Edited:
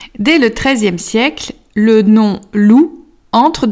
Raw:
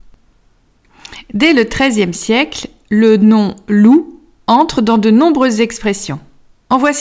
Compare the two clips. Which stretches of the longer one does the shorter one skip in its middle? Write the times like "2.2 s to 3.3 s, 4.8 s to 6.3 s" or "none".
none